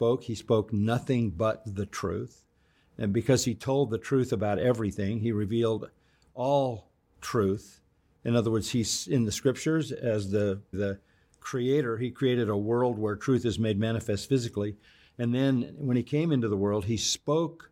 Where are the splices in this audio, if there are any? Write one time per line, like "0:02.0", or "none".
0:10.7